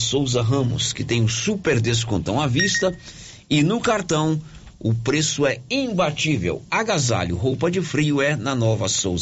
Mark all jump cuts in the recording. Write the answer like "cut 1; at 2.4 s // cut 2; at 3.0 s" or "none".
none

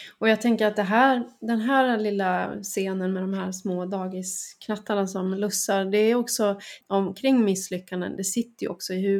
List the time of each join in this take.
cut 1; at 6.8 s

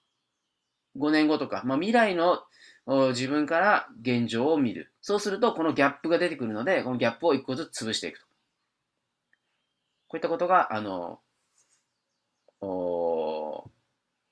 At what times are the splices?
cut 1; at 5.0 s

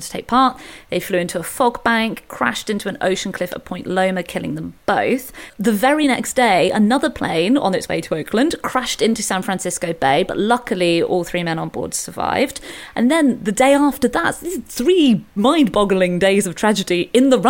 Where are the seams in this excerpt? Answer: none

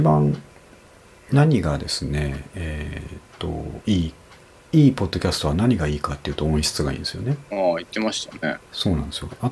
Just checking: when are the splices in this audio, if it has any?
none

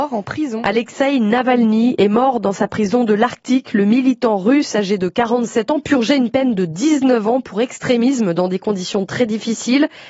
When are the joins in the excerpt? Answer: none

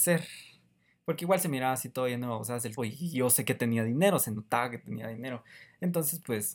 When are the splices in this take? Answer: cut 1; at 2.8 s

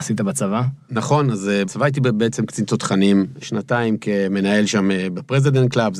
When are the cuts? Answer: cut 1; at 1.7 s // cut 2; at 3.4 s

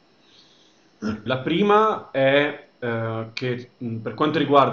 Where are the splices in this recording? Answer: cut 1; at 1.3 s

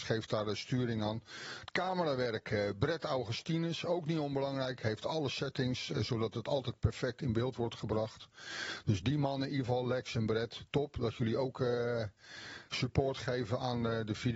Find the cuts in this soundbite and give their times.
none

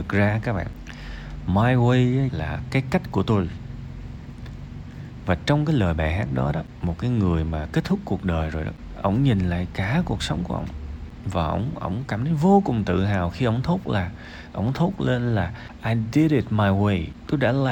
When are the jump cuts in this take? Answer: cut 1; at 2.3 s

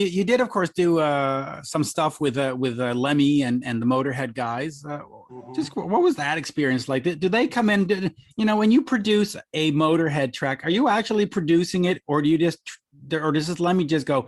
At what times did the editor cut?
none

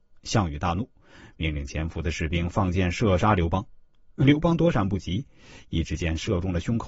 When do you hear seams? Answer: none

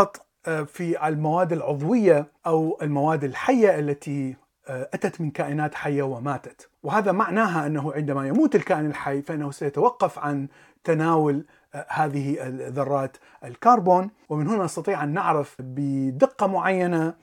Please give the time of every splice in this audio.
cut 1; at 2.4 s

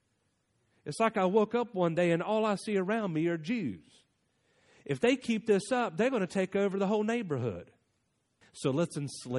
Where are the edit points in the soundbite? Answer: cut 1; at 8.4 s

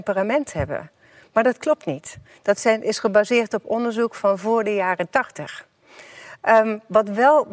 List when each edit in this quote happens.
none

